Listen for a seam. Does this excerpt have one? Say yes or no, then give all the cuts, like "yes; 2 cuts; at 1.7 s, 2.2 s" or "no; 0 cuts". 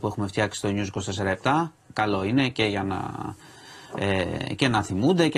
no; 0 cuts